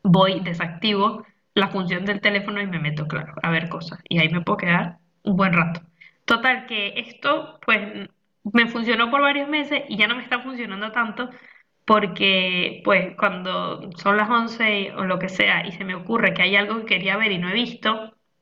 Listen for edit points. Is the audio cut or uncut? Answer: cut